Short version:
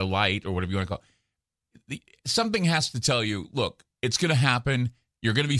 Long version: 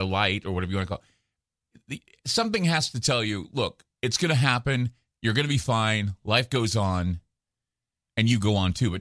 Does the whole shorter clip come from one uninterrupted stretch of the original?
yes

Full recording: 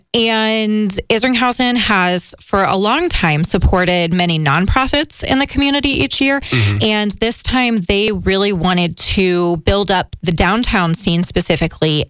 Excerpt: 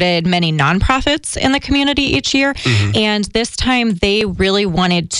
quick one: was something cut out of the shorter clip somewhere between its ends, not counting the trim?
no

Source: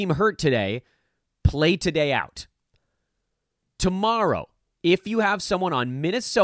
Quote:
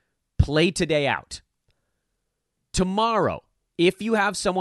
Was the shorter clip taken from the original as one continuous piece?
yes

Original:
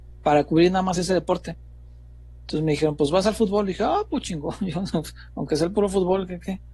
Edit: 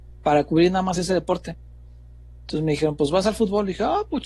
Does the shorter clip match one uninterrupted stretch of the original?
yes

